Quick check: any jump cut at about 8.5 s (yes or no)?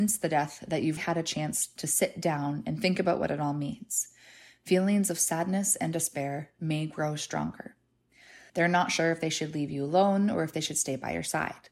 yes